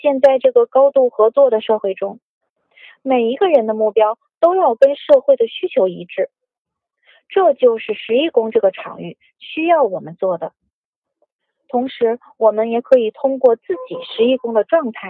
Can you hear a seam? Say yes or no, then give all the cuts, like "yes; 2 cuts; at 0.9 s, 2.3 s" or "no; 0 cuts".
no; 0 cuts